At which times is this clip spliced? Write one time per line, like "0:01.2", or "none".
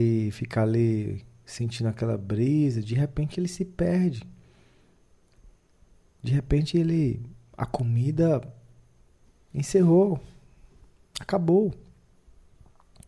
none